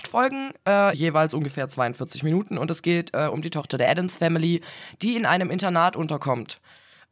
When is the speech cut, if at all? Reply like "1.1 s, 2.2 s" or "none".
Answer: 0.9 s